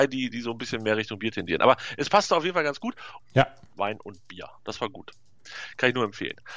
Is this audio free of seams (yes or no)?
no